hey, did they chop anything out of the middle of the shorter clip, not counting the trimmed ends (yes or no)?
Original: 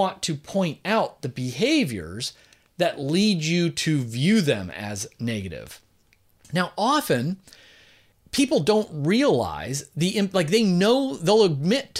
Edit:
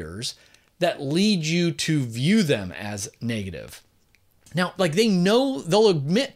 yes